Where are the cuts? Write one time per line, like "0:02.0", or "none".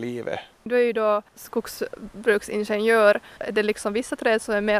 0:03.4